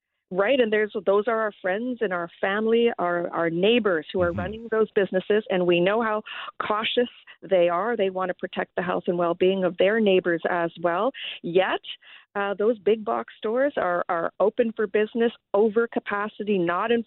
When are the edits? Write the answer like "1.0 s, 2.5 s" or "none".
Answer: none